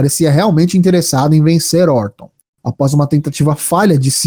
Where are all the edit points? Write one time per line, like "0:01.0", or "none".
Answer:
0:02.5